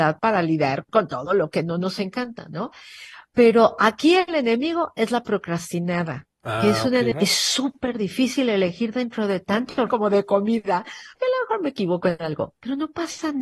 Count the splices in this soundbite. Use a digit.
3